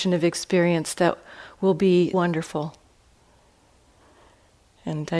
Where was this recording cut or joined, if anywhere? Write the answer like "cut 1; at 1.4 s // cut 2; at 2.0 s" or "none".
cut 1; at 2.1 s